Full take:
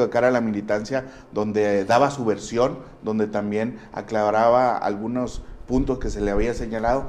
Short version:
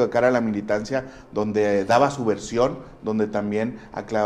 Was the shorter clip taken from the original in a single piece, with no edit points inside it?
yes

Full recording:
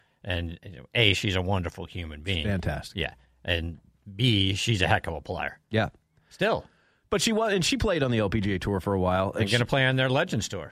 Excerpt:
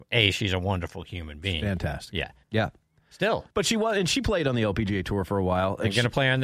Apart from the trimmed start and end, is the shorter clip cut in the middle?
yes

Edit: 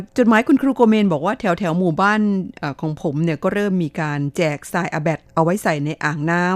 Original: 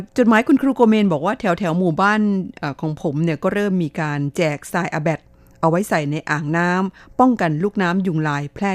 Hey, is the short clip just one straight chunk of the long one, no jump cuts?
no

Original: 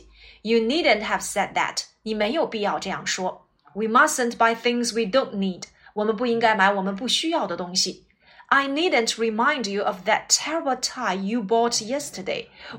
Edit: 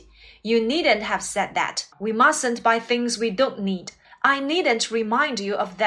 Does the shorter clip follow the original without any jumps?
no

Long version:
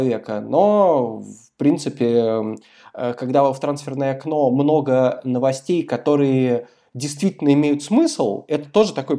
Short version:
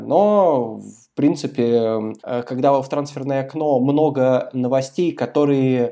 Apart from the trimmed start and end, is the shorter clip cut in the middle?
yes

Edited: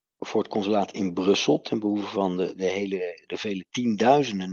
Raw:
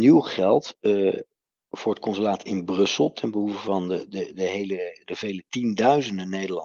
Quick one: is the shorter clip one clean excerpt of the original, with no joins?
no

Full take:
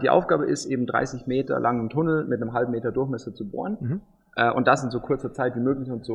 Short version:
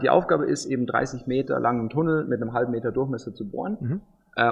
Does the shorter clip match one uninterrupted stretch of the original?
yes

